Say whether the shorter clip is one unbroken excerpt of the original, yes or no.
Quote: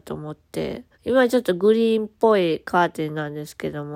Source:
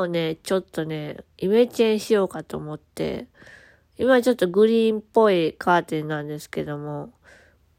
no